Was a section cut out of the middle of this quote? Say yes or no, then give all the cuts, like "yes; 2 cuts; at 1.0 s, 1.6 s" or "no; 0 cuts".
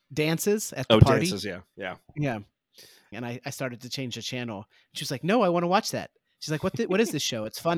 yes; 1 cut; at 3.1 s